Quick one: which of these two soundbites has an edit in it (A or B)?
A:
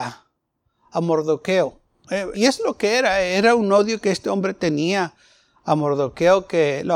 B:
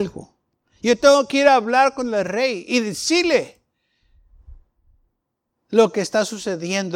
A